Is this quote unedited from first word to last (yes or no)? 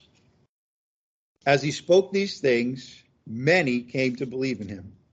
yes